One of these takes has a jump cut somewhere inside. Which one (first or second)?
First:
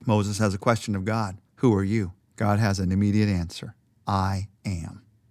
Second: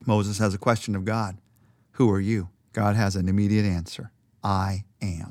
first